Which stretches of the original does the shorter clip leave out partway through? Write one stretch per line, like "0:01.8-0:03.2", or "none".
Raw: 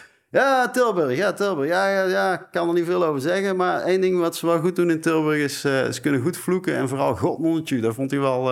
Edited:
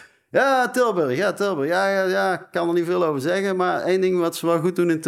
none